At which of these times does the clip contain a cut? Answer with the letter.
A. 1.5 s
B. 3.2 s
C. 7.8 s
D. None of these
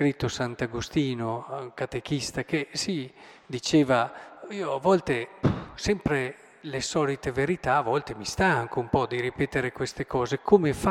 D